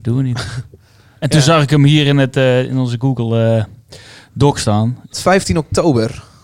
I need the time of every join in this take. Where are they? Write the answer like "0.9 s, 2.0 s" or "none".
5.1 s